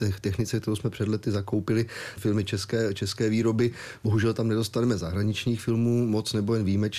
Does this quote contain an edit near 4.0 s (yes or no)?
no